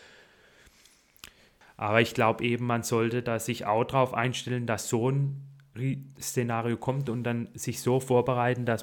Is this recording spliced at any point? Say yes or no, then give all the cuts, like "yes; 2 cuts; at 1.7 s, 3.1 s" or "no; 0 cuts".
yes; 1 cut; at 1.6 s